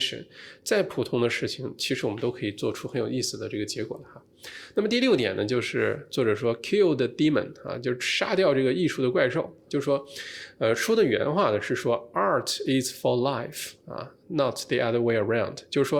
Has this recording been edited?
yes; 1 cut; at 9.7 s

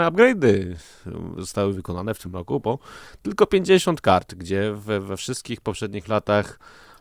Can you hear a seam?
no; 0 cuts

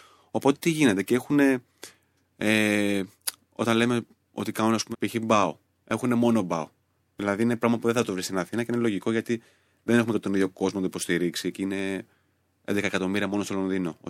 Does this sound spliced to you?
yes; 1 cut; at 4.9 s

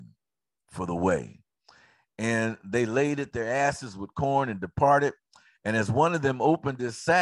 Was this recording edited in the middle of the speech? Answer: no; 0 cuts

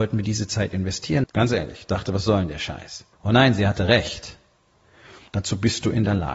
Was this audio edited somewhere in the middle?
yes; 3 cuts; at 1.2 s, 3.1 s, 5.3 s

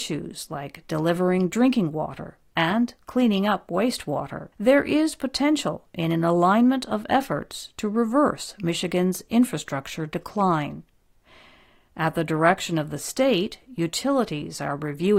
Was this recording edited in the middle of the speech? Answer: yes; 1 cut; at 4.5 s

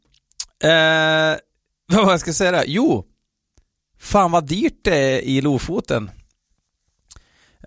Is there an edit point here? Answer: no; 0 cuts

